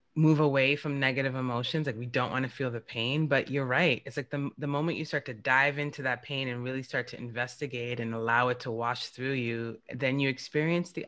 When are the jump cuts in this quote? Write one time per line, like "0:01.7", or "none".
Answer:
none